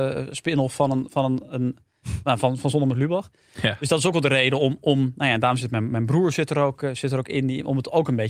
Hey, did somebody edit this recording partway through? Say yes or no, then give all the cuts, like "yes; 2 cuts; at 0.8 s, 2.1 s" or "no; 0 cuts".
no; 0 cuts